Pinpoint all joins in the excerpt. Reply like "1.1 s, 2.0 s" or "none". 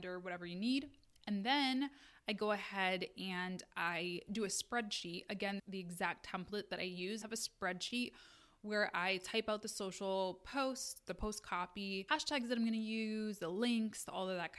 5.6 s, 7.2 s, 12.1 s